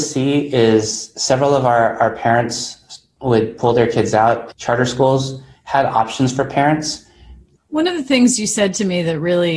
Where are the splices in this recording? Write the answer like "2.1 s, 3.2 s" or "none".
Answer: 4.5 s, 7.6 s